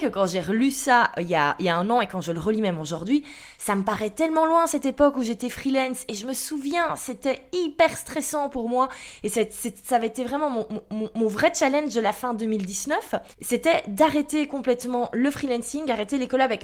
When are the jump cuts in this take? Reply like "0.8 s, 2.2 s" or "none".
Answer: 13.3 s